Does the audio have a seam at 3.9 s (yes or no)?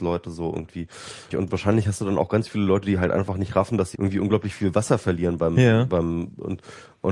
yes